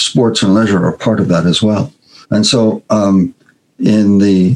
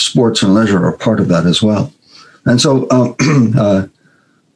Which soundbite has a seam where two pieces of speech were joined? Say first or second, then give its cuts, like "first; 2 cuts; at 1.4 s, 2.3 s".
first; 1 cut; at 2.2 s